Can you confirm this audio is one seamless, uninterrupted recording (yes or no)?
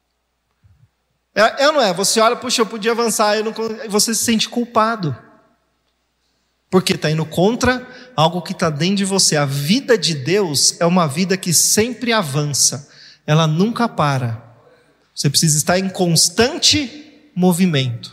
no